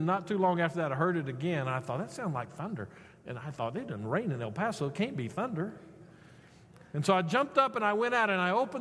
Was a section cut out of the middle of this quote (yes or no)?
no